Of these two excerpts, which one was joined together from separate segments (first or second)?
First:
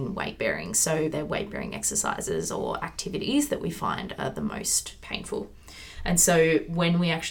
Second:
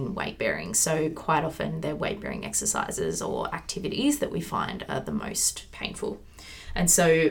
first